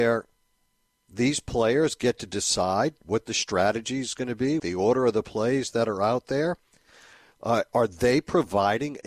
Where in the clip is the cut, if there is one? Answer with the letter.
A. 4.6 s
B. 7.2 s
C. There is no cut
A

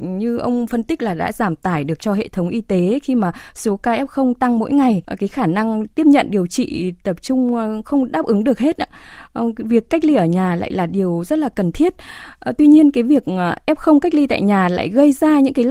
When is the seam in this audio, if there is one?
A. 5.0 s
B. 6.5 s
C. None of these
A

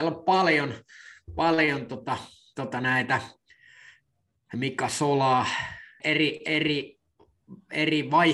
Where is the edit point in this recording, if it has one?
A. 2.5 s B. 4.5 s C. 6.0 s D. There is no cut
C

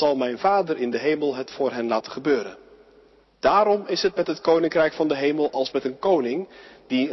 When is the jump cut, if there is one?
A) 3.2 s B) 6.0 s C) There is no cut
A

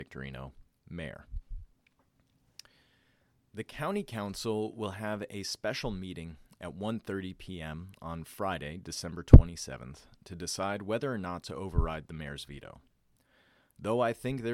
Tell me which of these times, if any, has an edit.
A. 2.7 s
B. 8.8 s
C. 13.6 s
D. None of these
D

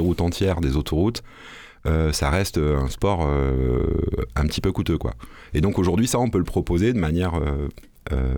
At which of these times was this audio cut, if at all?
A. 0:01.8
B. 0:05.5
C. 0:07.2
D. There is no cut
D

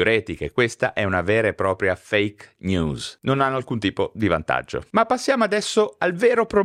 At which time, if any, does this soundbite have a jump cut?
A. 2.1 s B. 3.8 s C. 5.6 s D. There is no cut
D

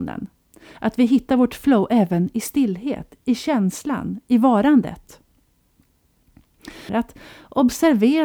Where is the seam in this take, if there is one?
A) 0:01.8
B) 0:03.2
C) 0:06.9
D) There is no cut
C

